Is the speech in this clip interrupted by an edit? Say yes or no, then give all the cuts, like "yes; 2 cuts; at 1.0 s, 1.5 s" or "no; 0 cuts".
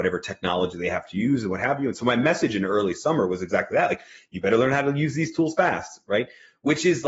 no; 0 cuts